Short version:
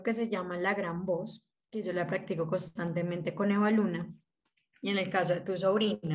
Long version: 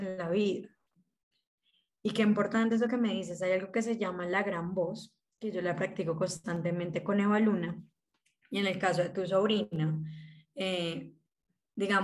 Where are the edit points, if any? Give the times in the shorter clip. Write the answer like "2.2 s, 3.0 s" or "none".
none